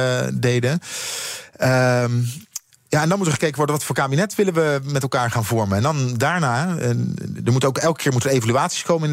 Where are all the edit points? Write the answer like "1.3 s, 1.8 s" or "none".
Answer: 5.3 s